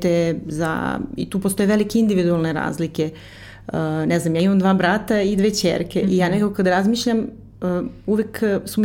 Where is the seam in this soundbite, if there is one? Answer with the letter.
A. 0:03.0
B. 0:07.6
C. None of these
B